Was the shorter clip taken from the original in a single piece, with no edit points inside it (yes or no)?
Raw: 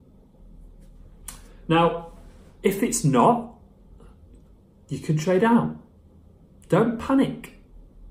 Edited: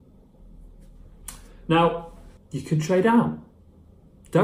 no